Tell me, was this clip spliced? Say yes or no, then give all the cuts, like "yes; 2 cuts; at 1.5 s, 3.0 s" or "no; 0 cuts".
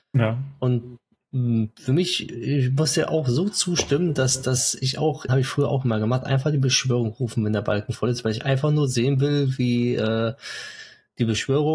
yes; 1 cut; at 5.3 s